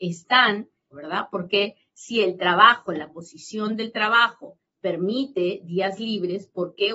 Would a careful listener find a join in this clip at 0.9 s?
yes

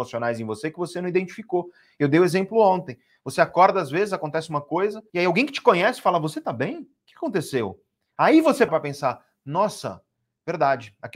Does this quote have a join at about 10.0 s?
no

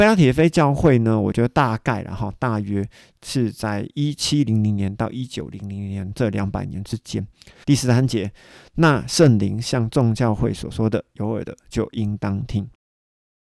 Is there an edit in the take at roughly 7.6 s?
yes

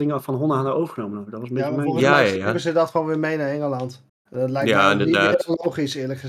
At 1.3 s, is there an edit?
no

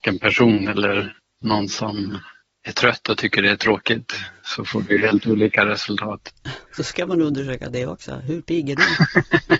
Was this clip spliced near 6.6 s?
no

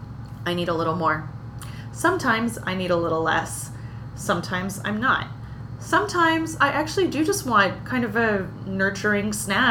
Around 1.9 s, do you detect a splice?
no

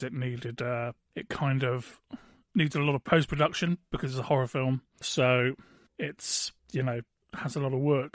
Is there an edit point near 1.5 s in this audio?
no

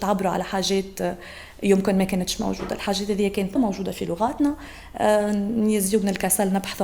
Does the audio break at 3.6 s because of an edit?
yes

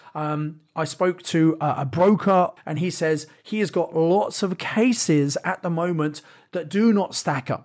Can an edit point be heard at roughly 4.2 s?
no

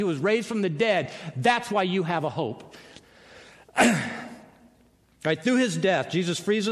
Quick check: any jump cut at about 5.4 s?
no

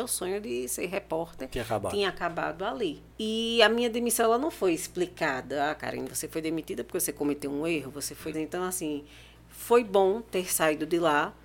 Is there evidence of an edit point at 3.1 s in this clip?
yes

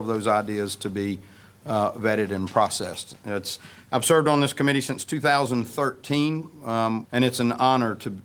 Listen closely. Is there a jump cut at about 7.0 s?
yes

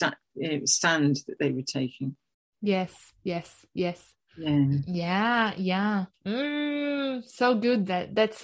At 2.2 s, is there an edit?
no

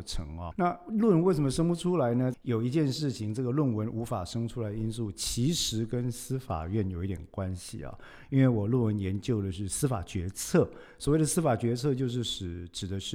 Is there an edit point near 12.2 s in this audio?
no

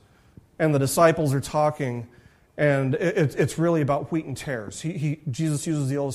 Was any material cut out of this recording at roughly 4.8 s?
no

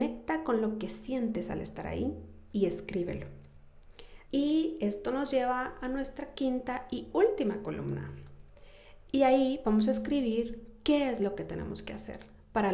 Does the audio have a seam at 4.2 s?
yes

